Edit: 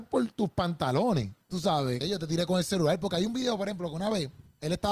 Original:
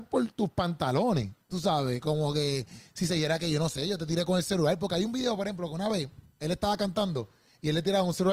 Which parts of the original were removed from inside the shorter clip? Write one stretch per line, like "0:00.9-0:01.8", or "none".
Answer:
0:02.0-0:03.8